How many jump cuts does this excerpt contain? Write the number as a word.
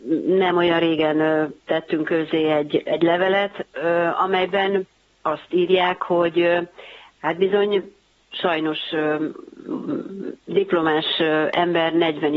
zero